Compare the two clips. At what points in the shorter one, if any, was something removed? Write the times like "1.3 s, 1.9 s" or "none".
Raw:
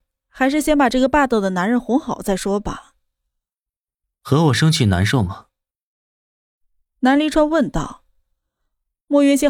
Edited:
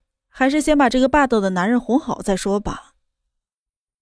none